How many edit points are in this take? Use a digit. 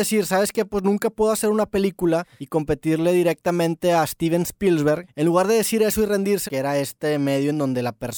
1